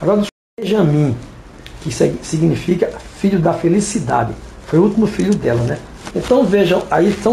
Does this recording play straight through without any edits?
no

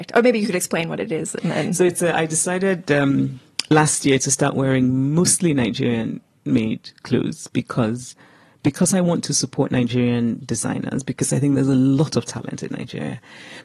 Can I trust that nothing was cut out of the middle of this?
yes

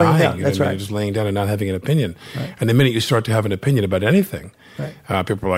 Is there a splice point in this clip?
no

